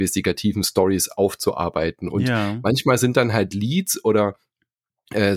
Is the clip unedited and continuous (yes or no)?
yes